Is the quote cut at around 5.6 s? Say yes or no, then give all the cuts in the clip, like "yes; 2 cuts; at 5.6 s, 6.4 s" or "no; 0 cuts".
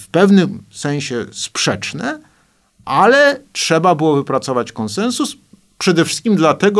no; 0 cuts